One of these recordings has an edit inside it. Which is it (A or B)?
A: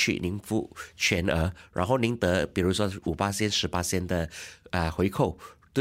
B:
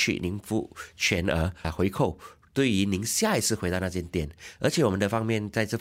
B